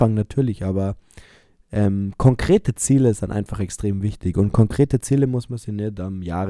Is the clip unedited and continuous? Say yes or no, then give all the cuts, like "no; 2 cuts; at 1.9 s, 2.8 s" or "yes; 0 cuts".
yes; 0 cuts